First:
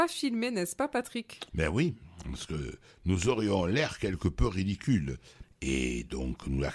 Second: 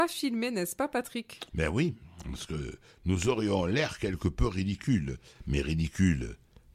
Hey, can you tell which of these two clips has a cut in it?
first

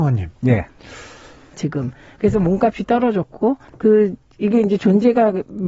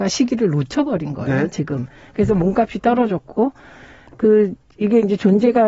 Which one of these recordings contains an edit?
first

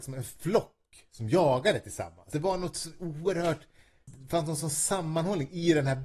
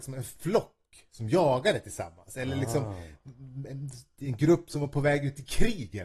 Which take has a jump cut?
first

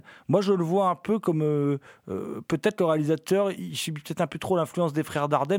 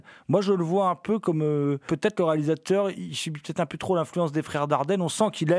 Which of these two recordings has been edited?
second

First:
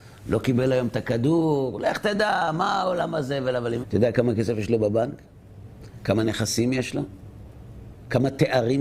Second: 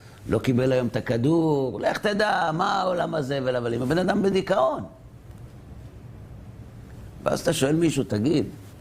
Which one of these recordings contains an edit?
first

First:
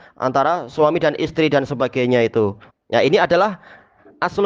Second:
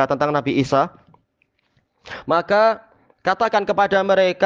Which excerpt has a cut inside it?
first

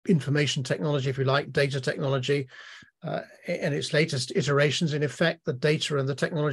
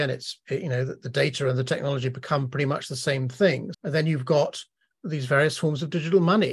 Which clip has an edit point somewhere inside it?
second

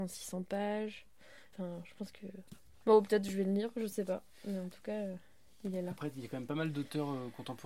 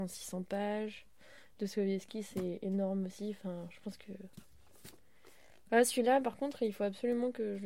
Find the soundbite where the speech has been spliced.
first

